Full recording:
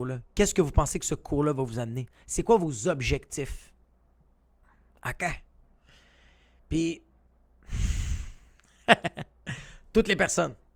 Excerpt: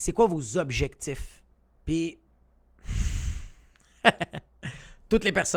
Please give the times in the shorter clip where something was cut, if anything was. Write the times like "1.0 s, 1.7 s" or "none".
1.8 s

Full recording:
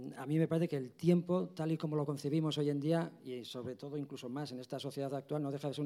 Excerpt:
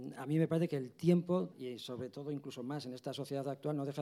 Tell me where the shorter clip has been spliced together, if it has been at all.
1.5 s

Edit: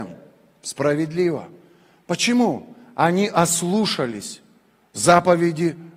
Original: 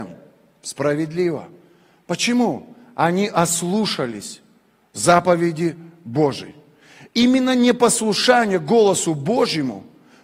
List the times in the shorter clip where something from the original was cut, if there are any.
none

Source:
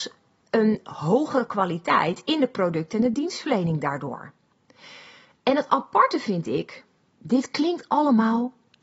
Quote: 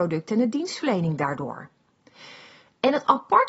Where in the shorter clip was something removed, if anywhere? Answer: none

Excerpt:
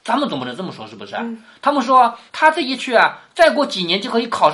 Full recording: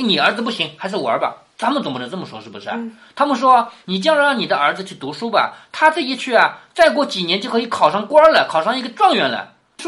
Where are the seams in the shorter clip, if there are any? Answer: 2.3 s

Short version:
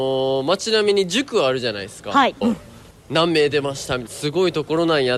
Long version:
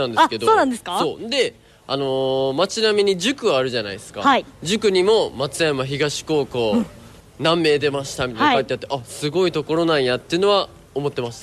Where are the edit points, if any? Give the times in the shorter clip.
2.4 s, 4.1 s

